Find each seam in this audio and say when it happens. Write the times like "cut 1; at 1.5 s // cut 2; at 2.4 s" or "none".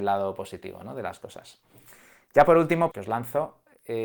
cut 1; at 2.9 s